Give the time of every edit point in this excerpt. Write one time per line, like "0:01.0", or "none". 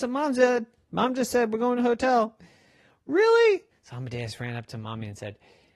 0:03.7